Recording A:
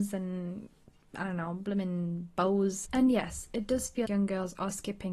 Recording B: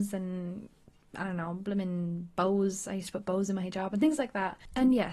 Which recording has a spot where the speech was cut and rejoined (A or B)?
A